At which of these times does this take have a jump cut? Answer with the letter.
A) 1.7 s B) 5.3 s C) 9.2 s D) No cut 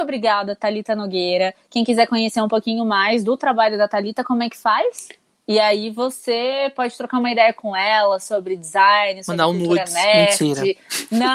B